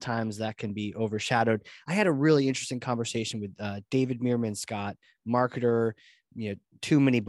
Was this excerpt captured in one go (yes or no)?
yes